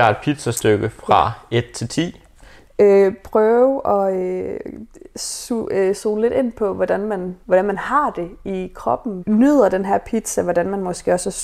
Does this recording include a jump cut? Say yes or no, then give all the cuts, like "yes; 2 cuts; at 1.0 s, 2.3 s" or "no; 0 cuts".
yes; 3 cuts; at 2.7 s, 7.4 s, 9.2 s